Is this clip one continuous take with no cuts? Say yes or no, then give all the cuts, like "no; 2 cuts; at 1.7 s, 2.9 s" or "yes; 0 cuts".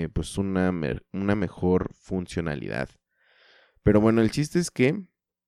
yes; 0 cuts